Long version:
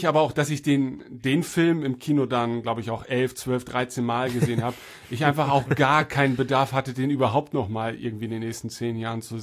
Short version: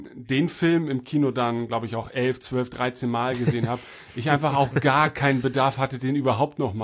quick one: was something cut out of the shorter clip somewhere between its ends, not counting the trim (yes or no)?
no